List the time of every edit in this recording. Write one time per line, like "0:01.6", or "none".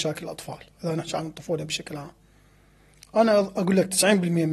none